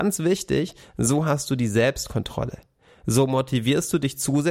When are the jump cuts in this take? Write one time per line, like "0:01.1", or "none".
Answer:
none

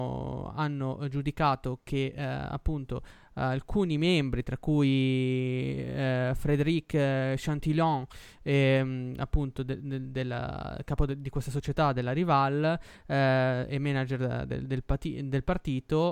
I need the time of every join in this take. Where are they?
none

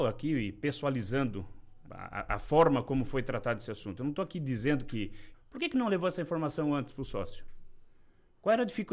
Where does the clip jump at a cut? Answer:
0:01.9
0:05.3

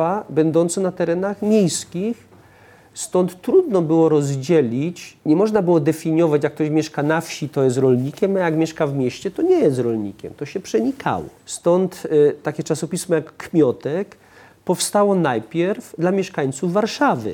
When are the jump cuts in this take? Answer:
0:05.2
0:11.4

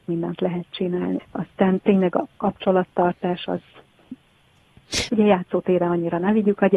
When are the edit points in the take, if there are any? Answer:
0:01.2
0:05.1

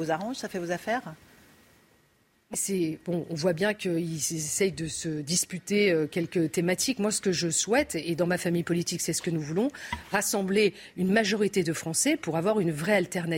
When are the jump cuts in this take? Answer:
0:02.5

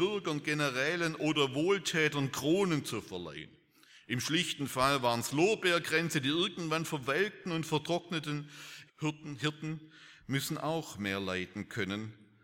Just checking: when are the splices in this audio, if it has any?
0:08.9

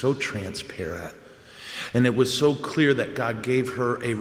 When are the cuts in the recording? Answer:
none

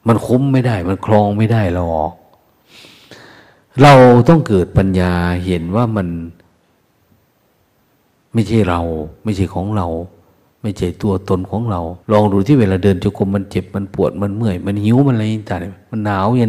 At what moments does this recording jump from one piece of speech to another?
0:12.0

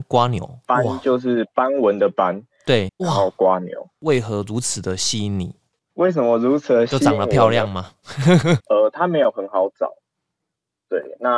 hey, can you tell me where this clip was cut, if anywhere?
0:02.9
0:08.6

